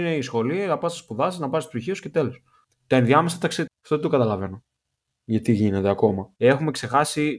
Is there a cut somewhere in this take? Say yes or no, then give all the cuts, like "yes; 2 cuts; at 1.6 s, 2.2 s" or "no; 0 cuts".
yes; 2 cuts; at 3.7 s, 6.4 s